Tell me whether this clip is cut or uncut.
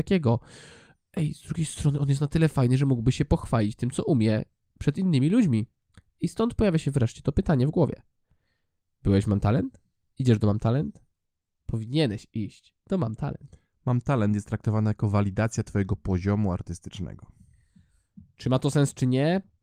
uncut